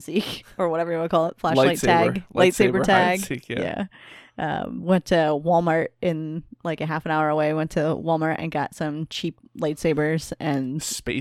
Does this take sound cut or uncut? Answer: uncut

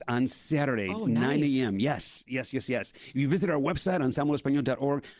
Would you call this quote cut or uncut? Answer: uncut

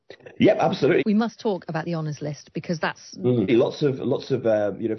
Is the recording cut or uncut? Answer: cut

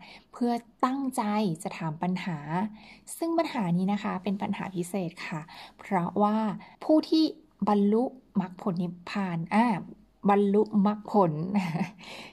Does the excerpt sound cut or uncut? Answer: cut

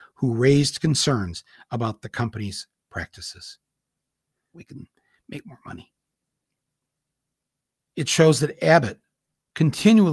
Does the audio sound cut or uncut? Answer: cut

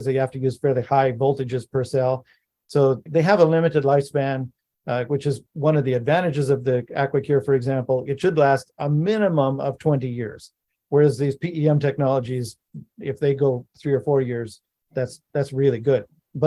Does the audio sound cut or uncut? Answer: cut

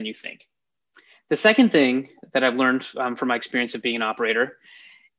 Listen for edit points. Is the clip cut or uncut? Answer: uncut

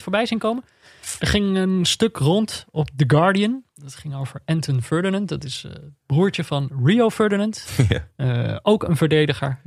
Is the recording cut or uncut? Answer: cut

